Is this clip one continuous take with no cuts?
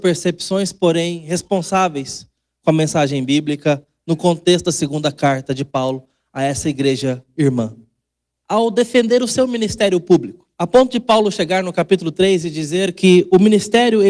no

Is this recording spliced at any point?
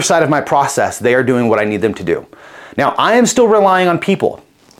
no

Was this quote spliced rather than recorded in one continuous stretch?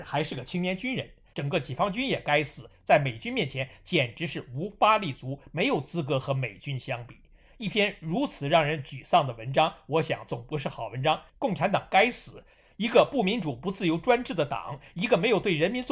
yes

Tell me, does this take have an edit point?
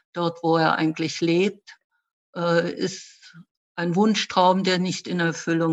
no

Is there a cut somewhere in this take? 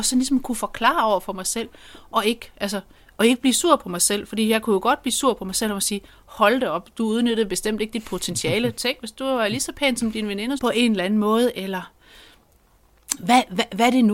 yes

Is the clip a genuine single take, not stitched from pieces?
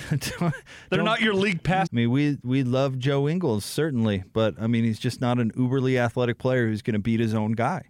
no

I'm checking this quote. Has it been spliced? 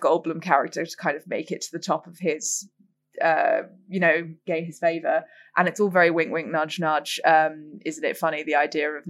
yes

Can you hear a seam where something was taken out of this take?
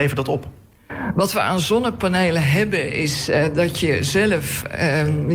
no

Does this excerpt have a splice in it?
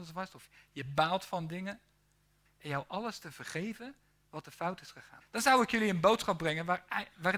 yes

